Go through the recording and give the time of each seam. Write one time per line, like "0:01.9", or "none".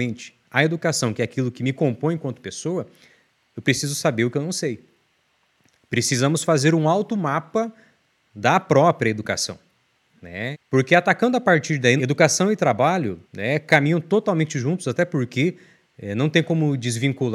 0:10.5
0:12.0
0:13.2